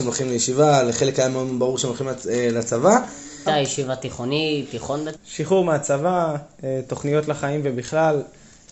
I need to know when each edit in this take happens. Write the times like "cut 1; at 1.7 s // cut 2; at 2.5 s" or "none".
cut 1; at 3.5 s // cut 2; at 5.1 s